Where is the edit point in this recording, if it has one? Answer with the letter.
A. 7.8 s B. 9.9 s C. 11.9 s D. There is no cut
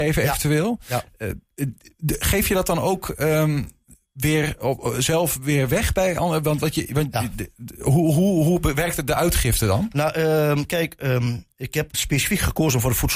C